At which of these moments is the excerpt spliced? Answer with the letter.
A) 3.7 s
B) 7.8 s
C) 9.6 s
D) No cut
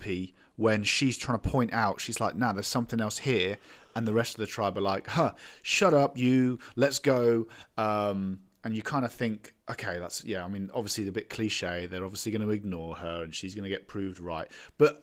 C